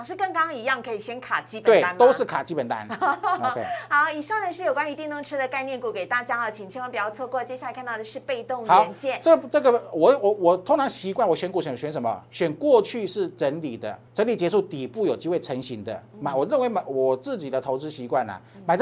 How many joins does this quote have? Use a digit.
1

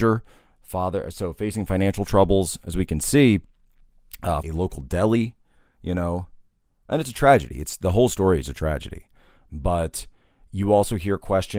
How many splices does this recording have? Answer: 1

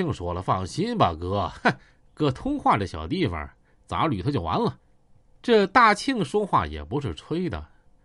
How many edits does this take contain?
1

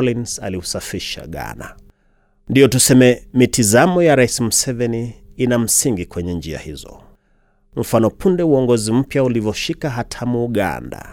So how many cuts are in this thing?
0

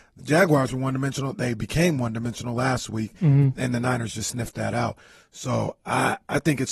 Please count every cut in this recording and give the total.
0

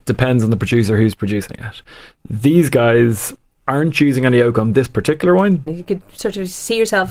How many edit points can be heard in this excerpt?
1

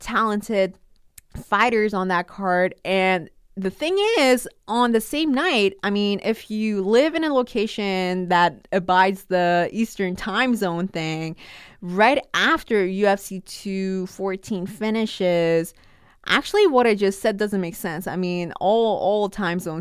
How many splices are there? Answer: 0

